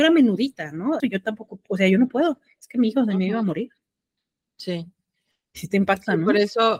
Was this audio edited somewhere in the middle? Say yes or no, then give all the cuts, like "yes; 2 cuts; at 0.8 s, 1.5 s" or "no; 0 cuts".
yes; 1 cut; at 1.0 s